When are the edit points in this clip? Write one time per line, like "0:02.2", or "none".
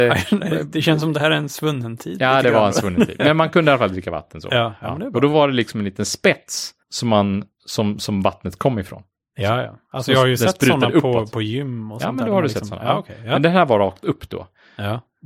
0:06.8